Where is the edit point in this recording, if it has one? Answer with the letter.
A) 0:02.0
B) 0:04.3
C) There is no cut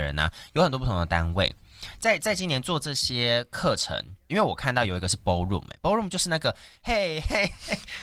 B